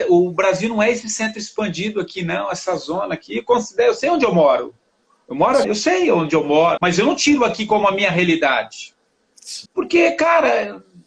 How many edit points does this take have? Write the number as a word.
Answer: three